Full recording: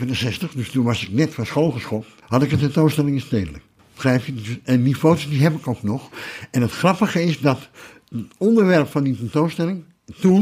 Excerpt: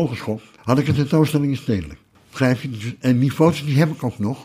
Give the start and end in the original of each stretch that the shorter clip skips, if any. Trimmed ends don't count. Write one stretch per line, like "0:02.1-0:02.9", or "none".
none